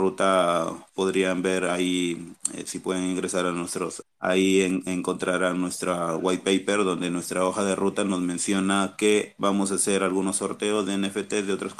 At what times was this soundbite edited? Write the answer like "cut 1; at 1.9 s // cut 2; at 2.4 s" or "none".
cut 1; at 4.0 s

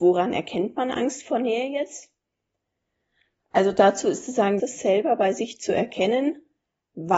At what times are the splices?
cut 1; at 4.6 s

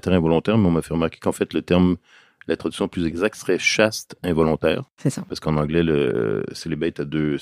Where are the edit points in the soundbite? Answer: none

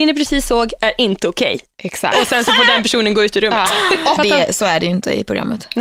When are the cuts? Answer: cut 1; at 4.2 s

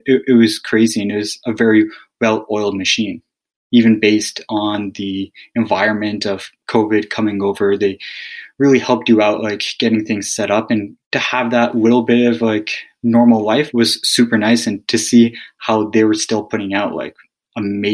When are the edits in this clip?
none

